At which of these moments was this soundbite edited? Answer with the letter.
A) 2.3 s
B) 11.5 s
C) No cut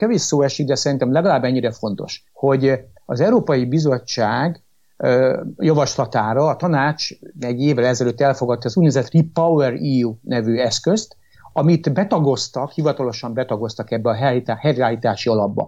A